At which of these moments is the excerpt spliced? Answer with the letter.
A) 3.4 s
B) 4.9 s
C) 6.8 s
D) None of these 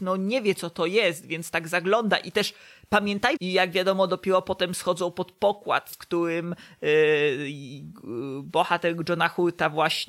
A